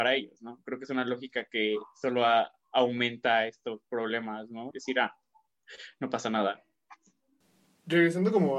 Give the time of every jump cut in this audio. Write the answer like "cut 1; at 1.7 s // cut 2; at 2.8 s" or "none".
cut 1; at 4.7 s